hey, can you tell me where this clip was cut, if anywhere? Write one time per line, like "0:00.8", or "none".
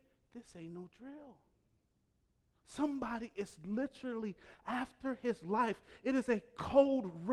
none

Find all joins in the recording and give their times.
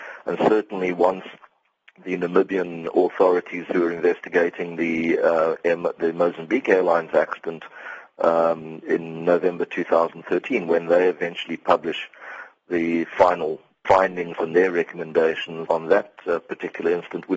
0:13.8
0:15.7

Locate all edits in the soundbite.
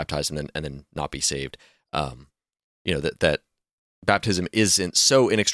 none

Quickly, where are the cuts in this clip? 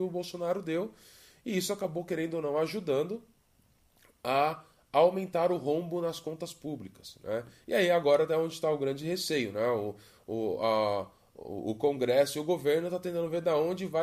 none

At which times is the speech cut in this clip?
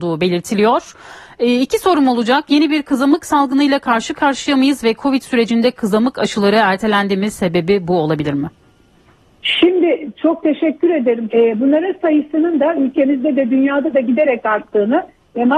0:11.3

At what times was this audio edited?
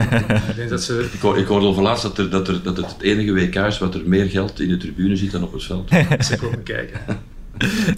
0:05.9

